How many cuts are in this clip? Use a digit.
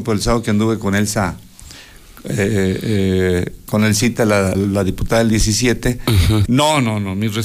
2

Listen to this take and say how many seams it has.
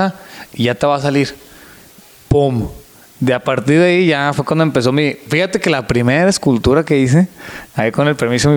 0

